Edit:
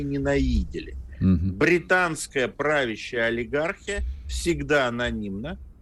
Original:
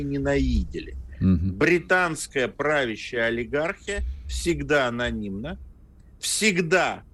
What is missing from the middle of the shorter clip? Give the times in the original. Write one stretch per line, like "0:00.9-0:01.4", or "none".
none